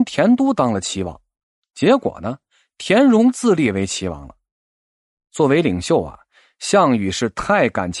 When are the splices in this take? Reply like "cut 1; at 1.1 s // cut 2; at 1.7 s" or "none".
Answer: none